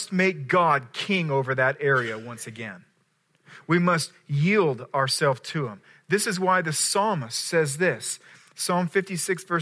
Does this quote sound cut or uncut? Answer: uncut